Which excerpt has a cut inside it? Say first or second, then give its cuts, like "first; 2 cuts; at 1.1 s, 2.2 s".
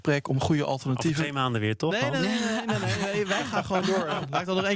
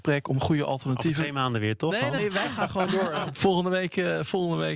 second; 2 cuts; at 2.2 s, 3.3 s